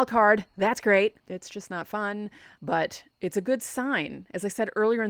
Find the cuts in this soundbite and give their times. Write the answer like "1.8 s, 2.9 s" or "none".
1.2 s, 2.6 s